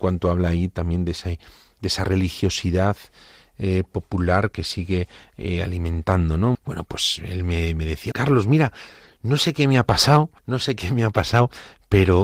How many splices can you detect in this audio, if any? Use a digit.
3